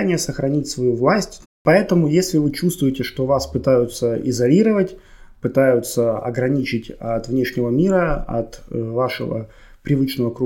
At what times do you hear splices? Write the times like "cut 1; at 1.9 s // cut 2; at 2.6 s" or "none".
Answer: cut 1; at 1.4 s